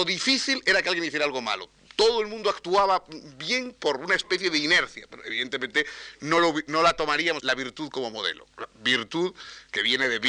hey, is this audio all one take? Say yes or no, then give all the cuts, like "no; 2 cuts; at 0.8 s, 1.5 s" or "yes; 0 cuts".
no; 1 cut; at 7.4 s